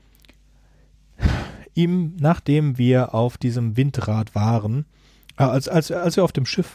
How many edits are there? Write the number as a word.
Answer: zero